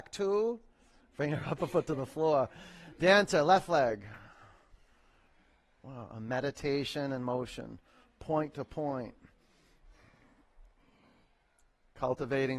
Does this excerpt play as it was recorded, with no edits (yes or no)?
yes